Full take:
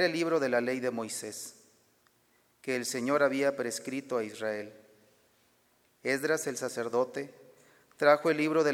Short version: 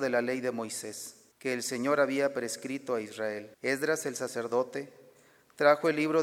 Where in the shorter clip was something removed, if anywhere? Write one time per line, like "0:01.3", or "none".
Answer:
0:01.3
0:03.5